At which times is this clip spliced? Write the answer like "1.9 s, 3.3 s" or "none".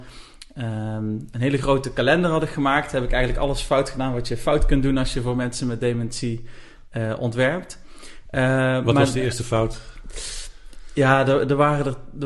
none